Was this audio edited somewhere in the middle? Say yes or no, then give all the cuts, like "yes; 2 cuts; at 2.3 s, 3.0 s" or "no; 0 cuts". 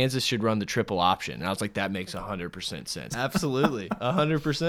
yes; 1 cut; at 3.1 s